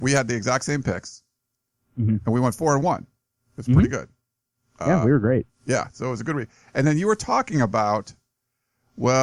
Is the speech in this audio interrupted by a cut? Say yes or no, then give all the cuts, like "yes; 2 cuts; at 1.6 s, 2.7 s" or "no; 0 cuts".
no; 0 cuts